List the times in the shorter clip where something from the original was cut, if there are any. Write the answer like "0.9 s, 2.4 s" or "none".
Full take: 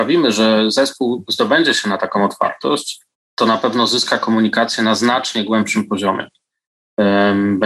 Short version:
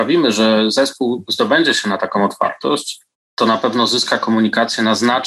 none